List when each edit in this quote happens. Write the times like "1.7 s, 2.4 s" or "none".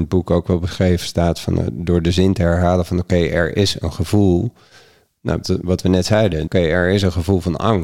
5.4 s, 6.5 s